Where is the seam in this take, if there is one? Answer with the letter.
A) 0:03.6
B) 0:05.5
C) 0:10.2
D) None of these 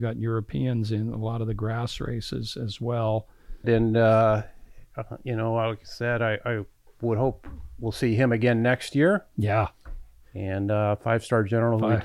A